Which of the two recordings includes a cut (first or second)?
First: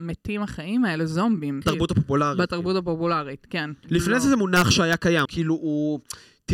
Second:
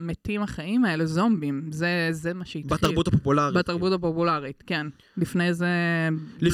first